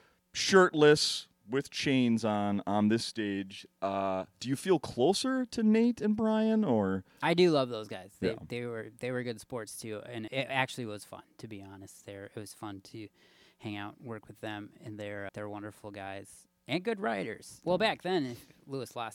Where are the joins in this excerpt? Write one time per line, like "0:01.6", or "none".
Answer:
0:10.3
0:15.3
0:17.6